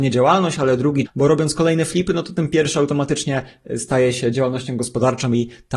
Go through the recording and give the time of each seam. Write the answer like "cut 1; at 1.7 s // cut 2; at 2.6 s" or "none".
cut 1; at 1.1 s